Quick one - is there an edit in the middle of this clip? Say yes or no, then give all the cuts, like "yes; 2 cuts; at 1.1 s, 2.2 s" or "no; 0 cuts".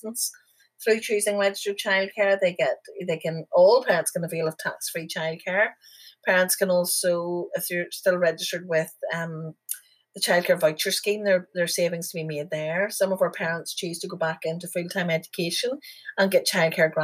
no; 0 cuts